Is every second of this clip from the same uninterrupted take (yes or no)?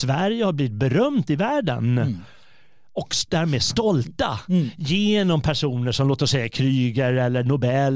yes